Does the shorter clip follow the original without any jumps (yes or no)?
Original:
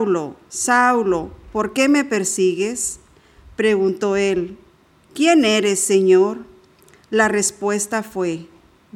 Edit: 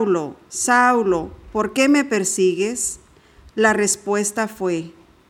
no